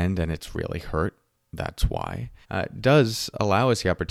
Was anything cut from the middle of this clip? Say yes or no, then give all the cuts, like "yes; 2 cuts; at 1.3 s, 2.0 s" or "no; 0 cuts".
yes; 1 cut; at 2.4 s